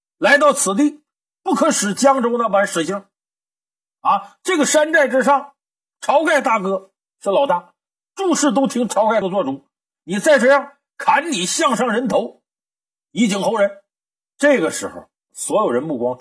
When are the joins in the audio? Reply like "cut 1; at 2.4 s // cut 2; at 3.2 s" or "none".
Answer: cut 1; at 9.2 s // cut 2; at 14.3 s